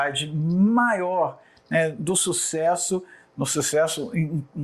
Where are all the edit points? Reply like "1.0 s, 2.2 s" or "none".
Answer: none